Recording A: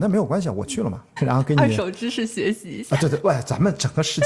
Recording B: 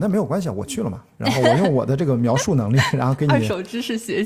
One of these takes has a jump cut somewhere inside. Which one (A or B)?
A